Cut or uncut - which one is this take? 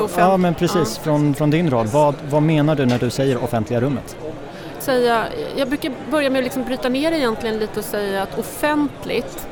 cut